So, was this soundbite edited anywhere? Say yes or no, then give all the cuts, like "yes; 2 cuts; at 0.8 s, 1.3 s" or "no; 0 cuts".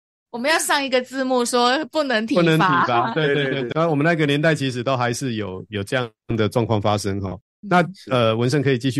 no; 0 cuts